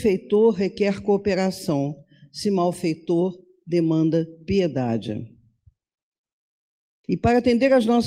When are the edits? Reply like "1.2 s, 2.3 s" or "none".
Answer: 7.0 s